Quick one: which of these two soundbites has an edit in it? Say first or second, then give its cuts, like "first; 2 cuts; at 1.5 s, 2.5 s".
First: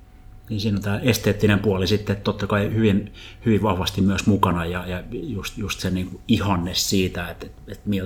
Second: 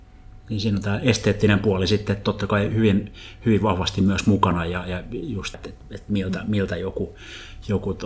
second; 1 cut; at 5.5 s